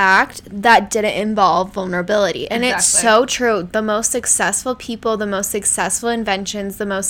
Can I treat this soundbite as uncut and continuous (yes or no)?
yes